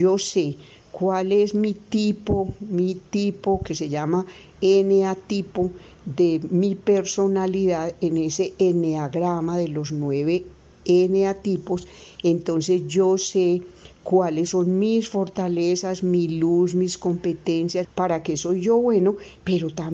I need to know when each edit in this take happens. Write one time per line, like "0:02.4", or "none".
0:17.8